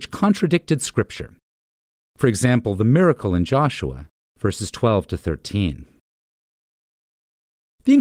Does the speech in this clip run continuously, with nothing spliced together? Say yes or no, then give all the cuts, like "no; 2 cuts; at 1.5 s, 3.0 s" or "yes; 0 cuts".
no; 1 cut; at 4.3 s